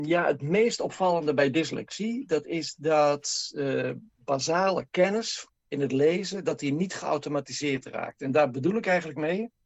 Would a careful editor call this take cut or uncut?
uncut